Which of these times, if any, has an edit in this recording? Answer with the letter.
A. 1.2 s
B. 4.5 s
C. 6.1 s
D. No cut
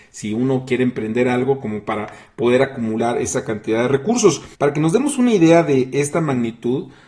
B